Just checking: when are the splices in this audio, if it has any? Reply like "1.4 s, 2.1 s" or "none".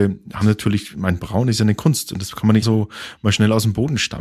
2.6 s